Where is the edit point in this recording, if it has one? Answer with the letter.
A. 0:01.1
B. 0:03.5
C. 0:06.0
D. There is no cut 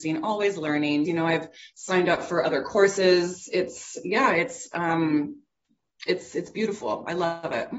A